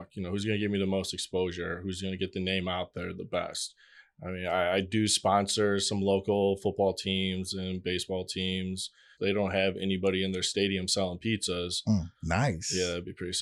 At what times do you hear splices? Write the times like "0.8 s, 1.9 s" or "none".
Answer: 9.1 s, 12.1 s